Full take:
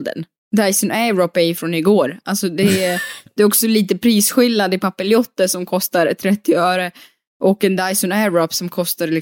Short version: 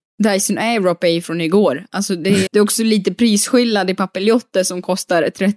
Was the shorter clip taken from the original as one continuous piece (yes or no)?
no